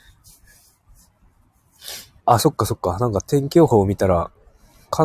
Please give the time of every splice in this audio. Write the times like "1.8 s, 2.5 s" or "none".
2.2 s